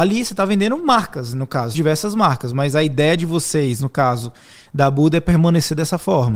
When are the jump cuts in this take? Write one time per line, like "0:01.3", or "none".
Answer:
0:01.7

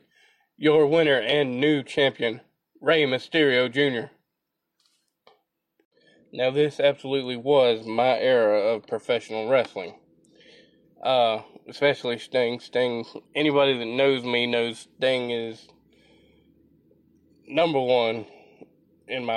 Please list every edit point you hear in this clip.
0:10.8
0:13.2

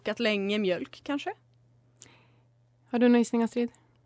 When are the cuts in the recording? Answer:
none

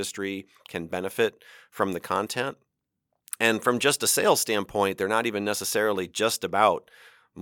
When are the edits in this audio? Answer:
none

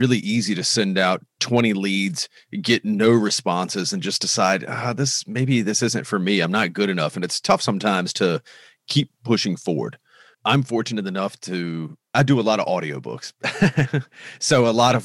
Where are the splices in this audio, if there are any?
none

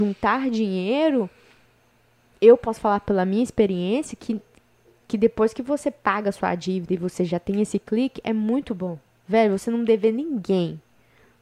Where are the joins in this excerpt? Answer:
none

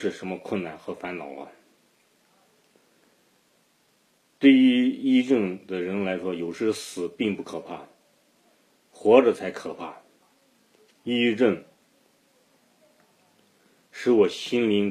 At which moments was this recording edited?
0:08.7
0:10.9

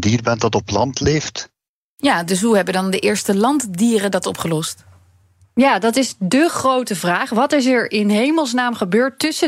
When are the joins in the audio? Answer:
none

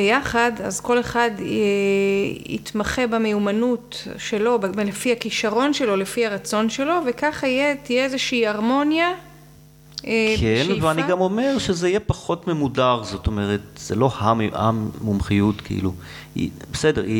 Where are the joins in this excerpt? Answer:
none

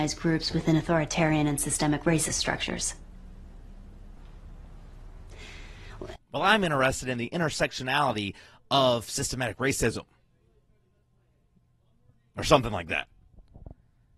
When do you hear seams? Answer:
0:06.2

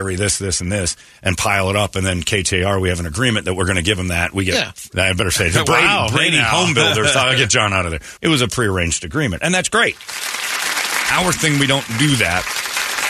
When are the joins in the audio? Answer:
0:04.9
0:08.2

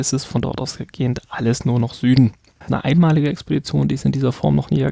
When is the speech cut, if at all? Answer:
0:02.7

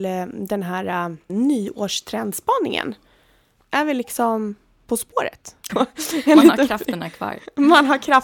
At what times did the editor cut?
0:01.3
0:05.7

